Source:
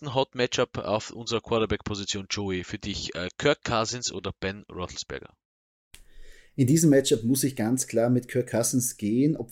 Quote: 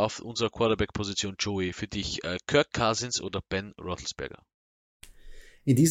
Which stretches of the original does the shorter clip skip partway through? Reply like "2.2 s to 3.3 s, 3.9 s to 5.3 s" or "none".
none